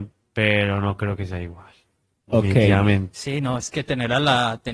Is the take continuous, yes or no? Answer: yes